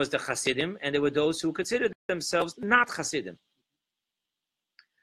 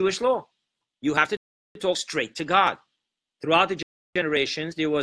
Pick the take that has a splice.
second; 1 cut; at 3.3 s

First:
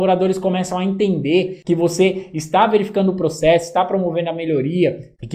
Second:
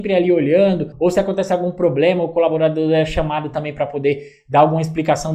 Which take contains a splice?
second; 1 cut; at 0.9 s

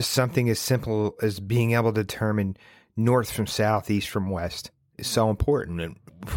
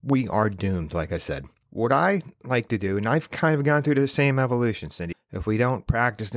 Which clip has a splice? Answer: second; 1 cut; at 5.1 s

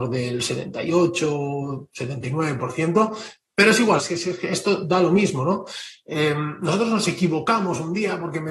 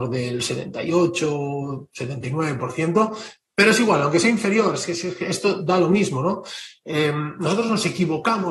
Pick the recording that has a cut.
first; 1 cut; at 4.0 s

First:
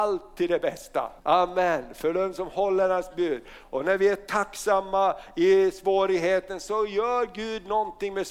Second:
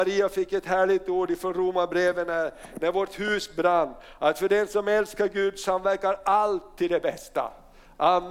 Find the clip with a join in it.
first; 1 cut; at 1.2 s

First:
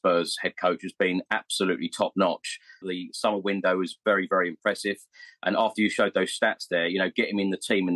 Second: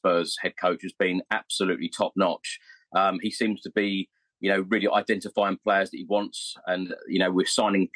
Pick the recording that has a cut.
first; 1 cut; at 2.8 s

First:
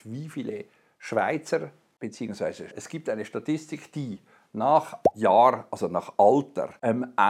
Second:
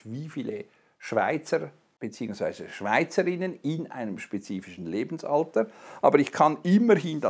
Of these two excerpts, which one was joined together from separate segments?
first; 1 cut; at 2.7 s

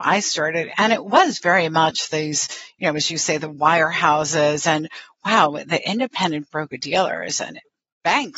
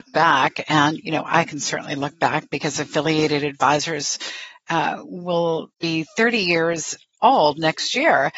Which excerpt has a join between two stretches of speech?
second; 1 cut; at 5.7 s

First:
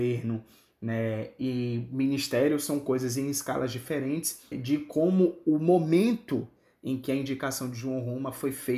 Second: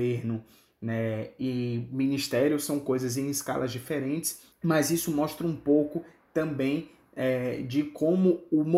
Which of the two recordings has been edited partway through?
first; 1 cut; at 4.5 s

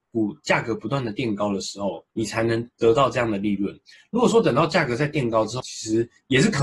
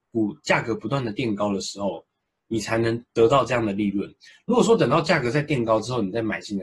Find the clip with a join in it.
first; 2 cuts; at 2.1 s, 5.6 s

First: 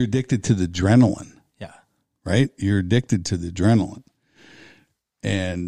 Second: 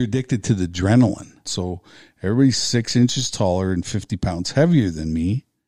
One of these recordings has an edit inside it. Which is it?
second; 1 cut; at 1.4 s

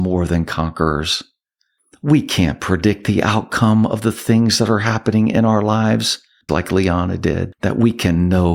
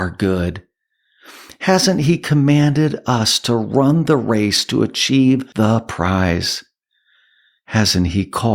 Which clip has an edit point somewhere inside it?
first; 1 cut; at 6.5 s

